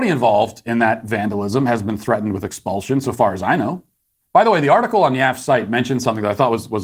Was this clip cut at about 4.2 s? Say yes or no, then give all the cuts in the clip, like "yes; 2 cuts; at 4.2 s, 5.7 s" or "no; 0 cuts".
yes; 1 cut; at 4.2 s